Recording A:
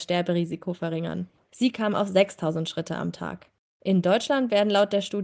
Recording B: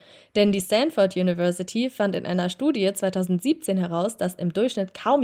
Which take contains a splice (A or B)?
A